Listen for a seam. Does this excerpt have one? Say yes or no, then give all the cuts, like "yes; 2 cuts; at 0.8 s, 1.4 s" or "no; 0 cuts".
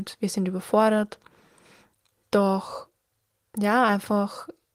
no; 0 cuts